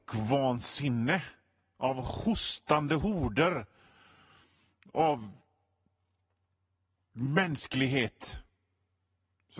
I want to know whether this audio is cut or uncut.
uncut